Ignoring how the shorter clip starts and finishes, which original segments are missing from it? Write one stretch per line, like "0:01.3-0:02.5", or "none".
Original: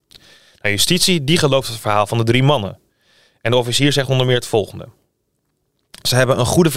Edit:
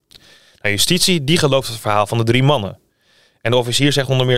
none